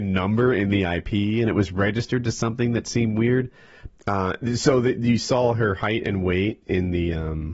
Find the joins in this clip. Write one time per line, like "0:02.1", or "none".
0:03.9